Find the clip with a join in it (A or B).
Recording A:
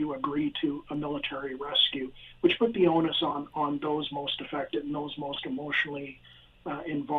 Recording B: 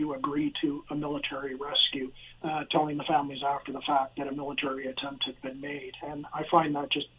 B